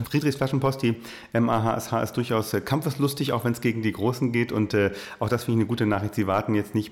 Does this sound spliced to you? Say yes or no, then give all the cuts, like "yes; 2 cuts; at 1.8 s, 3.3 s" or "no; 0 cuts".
no; 0 cuts